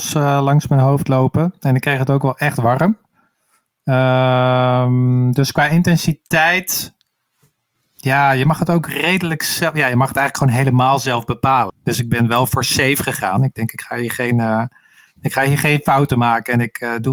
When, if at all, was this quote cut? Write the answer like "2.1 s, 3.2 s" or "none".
11.7 s